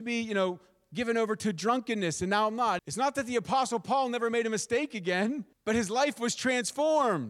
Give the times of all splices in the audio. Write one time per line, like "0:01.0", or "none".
0:02.8
0:05.5